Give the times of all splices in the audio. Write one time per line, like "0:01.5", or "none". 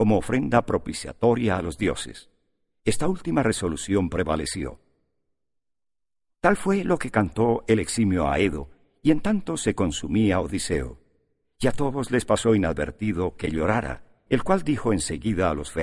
0:14.3